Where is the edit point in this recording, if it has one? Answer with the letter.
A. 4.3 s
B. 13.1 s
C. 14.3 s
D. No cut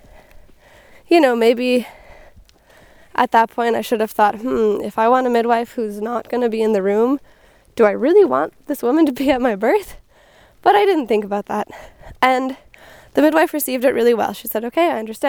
D